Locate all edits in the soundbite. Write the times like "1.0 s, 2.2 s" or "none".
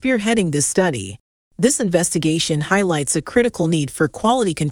1.4 s